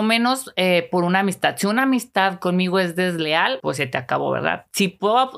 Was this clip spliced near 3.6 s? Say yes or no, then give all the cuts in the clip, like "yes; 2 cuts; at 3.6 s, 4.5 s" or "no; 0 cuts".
yes; 1 cut; at 3.6 s